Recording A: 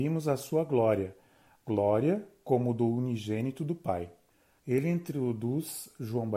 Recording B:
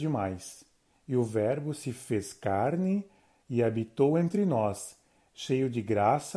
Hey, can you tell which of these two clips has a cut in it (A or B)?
A